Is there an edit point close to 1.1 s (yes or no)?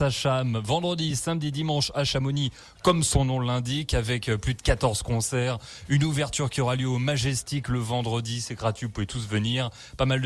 no